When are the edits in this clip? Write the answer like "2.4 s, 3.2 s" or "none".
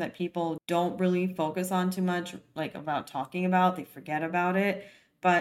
none